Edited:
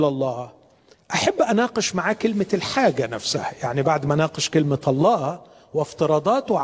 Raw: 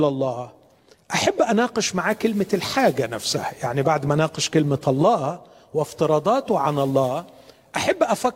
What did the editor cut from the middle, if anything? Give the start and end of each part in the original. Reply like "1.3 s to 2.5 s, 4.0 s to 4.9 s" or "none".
none